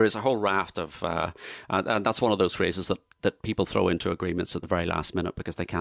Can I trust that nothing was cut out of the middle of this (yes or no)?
yes